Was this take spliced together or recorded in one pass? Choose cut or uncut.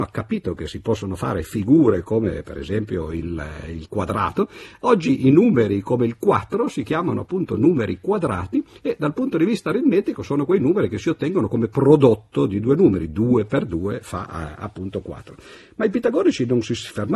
cut